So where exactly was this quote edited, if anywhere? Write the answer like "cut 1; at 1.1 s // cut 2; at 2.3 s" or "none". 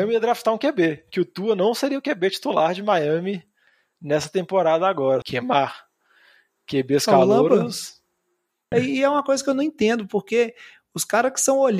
cut 1; at 5.2 s // cut 2; at 8.7 s